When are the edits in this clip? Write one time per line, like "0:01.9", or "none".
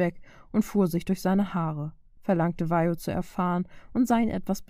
0:02.2